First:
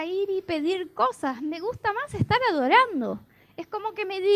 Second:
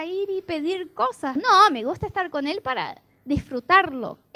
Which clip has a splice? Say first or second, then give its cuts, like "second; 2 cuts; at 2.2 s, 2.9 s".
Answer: second; 1 cut; at 1.4 s